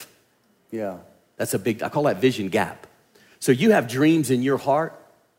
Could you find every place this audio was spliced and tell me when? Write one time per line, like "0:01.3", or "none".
none